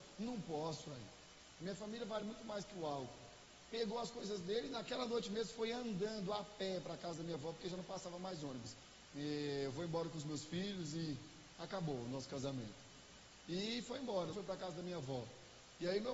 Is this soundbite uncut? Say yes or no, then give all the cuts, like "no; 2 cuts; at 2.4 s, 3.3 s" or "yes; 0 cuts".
no; 2 cuts; at 9.1 s, 14.3 s